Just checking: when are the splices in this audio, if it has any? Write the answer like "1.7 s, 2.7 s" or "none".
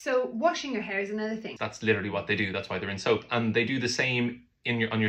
1.6 s

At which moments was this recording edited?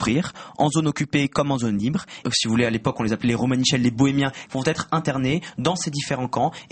2.2 s, 4.5 s

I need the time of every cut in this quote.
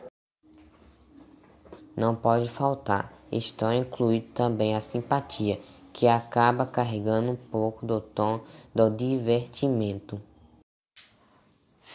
1.8 s

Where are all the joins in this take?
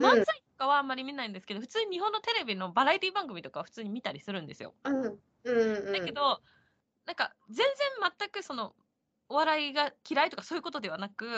4.8 s, 10.0 s

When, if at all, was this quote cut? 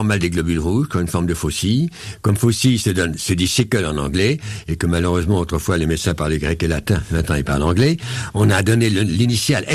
none

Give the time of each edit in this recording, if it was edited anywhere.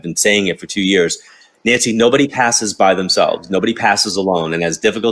none

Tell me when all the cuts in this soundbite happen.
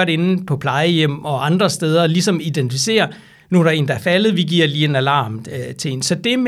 none

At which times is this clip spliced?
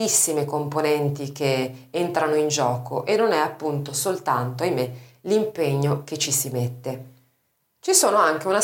none

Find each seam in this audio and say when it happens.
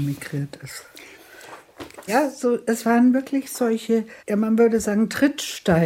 2.1 s, 4.2 s

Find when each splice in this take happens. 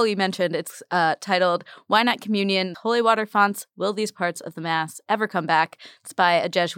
2.7 s

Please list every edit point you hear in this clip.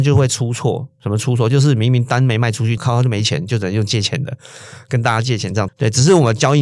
2.8 s, 5.7 s

